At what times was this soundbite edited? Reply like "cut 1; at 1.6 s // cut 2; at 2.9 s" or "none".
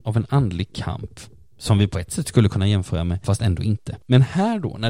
cut 1; at 3.2 s